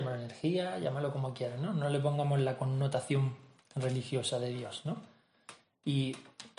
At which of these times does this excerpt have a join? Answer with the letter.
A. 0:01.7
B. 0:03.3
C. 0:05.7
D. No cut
D